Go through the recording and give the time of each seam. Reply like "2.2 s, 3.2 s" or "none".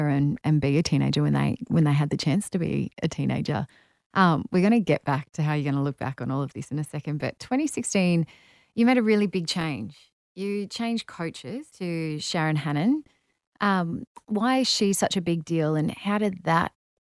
11.7 s